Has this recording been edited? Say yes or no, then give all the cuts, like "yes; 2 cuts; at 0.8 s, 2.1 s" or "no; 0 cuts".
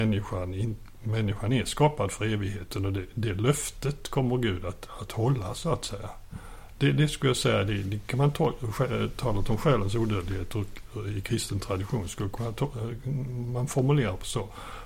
no; 0 cuts